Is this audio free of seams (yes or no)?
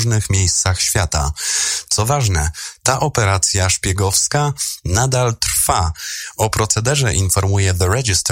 yes